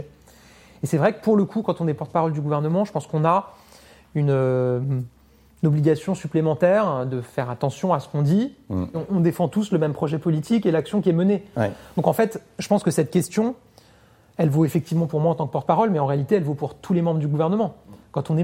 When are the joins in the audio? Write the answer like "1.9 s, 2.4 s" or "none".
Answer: 8.9 s

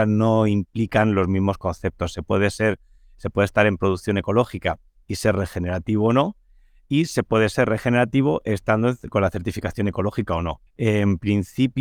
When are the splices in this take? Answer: 10.7 s

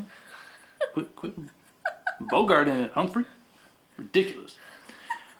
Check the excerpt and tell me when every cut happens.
none

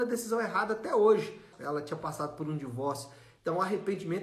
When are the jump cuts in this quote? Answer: 1.5 s

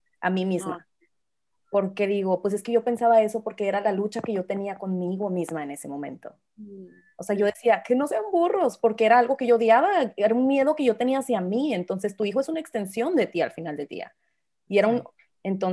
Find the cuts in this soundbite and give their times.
none

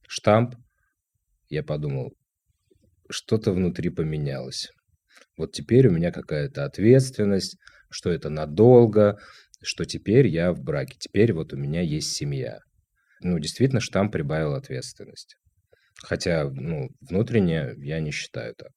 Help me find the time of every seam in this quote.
none

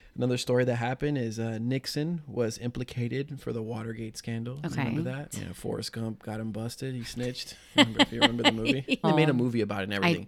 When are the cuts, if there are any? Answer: 5.3 s, 9.0 s

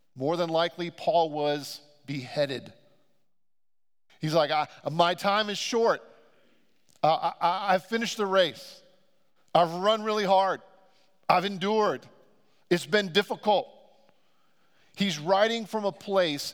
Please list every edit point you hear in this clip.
4.1 s

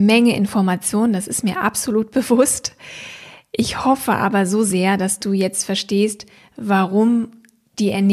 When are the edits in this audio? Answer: none

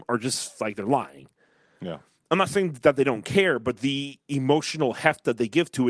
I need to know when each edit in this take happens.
none

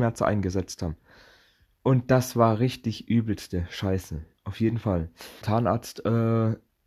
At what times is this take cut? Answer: 5.4 s

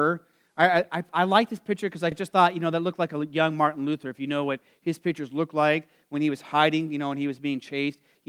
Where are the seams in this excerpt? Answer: none

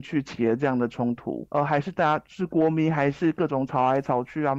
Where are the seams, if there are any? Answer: 1.5 s

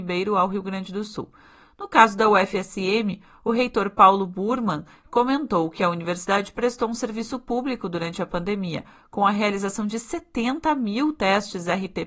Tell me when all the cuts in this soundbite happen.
none

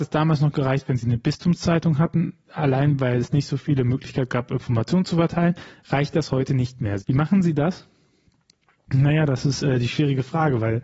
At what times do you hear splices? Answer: 7.0 s

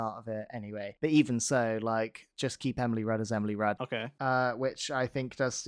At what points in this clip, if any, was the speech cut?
3.8 s

